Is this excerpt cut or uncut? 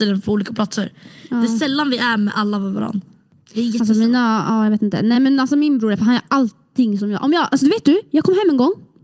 uncut